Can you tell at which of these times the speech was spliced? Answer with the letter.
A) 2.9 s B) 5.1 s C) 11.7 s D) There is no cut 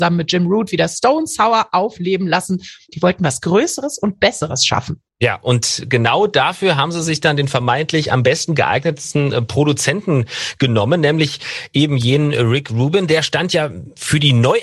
A